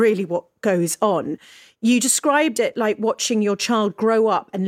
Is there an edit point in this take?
no; 0 cuts

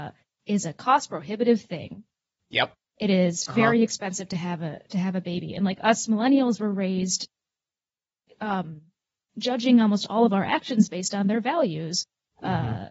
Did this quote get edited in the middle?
no; 0 cuts

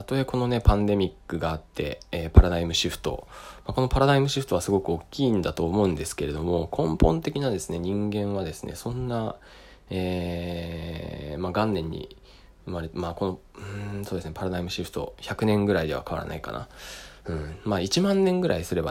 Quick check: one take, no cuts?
yes; 0 cuts

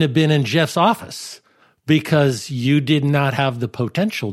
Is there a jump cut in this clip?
no; 0 cuts

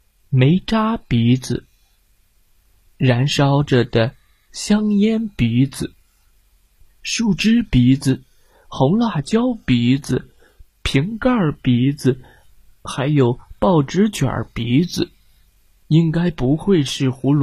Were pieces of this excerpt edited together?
yes; 1 cut; at 15.8 s

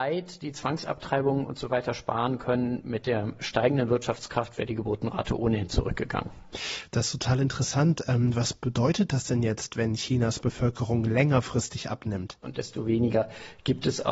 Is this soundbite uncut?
no; 1 cut; at 12.4 s

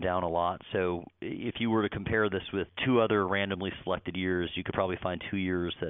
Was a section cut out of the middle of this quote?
no; 0 cuts

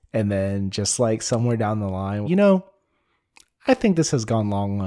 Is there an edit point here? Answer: yes; 1 cut; at 2.2 s

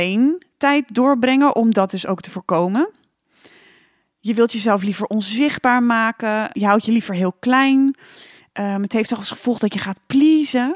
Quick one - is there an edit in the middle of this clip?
no; 0 cuts

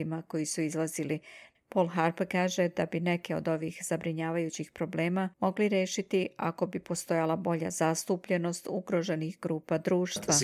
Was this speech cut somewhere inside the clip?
yes; 2 cuts; at 1.5 s, 5.3 s

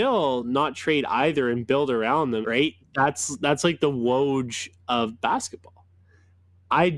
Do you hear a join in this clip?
yes; 1 cut; at 2.4 s

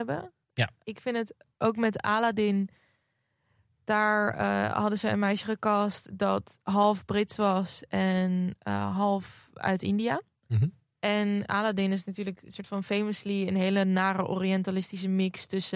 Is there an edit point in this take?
no; 0 cuts

